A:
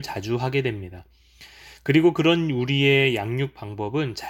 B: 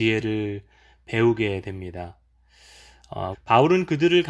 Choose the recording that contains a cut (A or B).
B